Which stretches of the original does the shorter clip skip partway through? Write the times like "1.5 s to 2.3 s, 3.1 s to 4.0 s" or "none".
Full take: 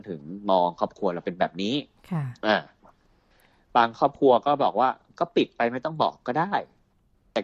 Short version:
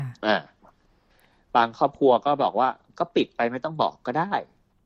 none

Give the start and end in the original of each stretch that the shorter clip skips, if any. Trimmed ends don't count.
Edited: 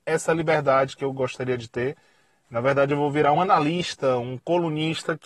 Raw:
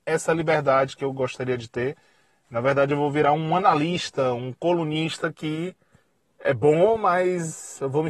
3.3 s to 3.5 s

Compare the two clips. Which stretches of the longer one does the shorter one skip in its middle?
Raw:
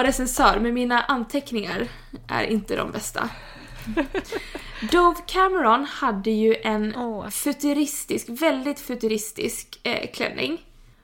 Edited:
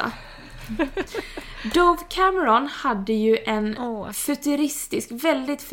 none

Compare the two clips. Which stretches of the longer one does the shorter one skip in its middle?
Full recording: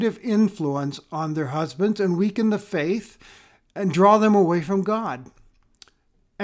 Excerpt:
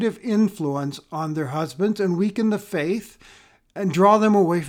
none

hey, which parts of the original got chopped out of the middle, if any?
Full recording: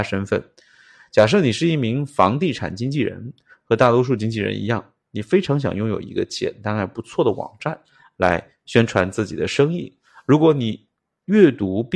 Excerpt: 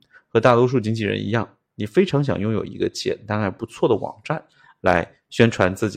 none

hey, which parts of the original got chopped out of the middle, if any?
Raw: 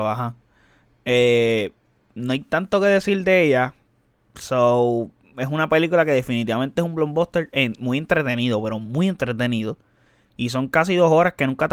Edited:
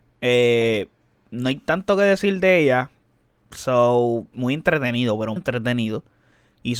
5.2 s to 7.8 s, 8.8 s to 9.1 s

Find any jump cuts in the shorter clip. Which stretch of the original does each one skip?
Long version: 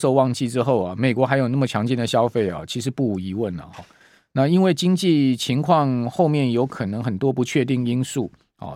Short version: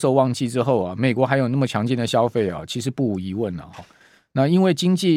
none

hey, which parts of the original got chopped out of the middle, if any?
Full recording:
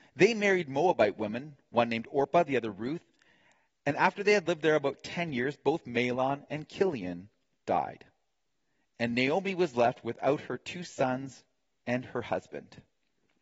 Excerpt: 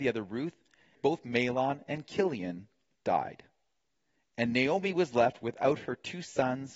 3.4 s to 5.6 s

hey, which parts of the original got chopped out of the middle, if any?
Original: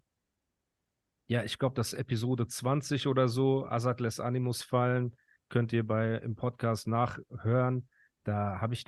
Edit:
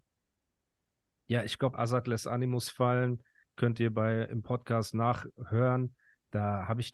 1.7 s to 3.7 s

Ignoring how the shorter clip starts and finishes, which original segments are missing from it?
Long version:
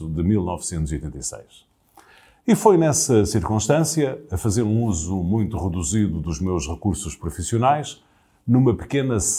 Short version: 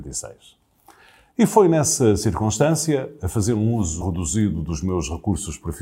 5.1 s to 5.6 s

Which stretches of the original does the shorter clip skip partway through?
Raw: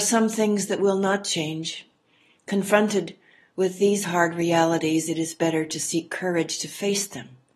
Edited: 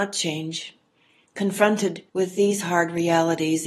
3.2 s to 3.5 s

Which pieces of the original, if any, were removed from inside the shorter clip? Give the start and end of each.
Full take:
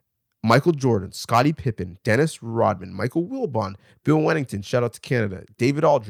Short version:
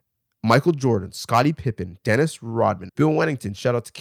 2.9 s to 4.0 s

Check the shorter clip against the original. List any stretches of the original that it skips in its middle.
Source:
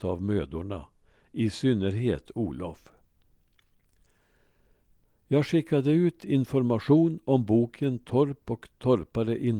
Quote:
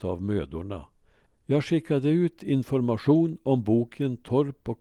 1.3 s to 5.1 s

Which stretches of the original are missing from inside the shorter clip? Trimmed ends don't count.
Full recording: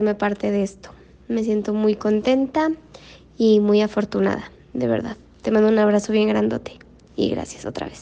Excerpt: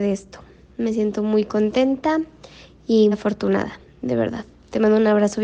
3.6 s to 3.8 s

